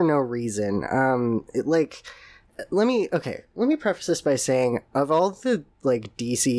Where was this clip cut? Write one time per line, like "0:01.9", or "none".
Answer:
none